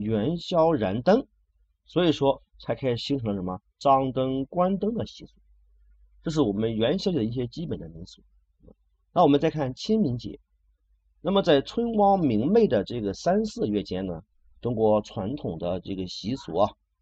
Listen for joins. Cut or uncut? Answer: uncut